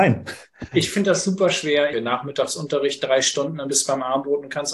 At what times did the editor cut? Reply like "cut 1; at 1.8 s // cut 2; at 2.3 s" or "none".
cut 1; at 1.9 s